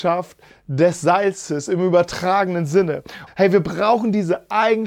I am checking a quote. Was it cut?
yes; 1 cut; at 3.3 s

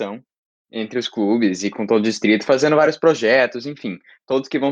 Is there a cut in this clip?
no; 0 cuts

